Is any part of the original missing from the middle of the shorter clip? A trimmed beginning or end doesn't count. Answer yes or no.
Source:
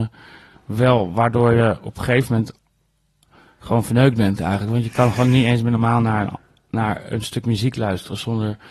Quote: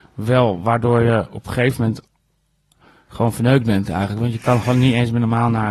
no